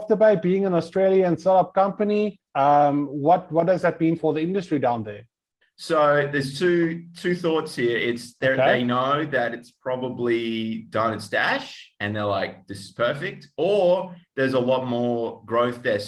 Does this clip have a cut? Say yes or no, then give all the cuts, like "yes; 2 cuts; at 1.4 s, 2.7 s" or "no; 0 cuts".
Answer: yes; 2 cuts; at 4.2 s, 5.6 s